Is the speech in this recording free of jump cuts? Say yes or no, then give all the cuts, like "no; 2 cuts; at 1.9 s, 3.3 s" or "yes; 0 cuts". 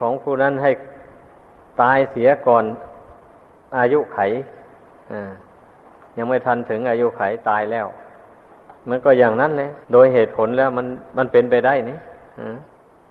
no; 2 cuts; at 8.8 s, 9.8 s